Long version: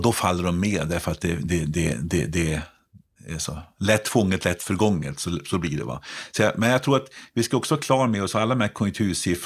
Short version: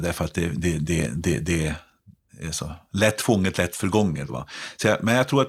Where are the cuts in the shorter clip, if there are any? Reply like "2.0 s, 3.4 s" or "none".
4.3 s